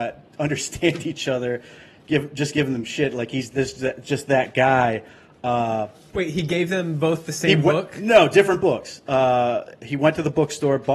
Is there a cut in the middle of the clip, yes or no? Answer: no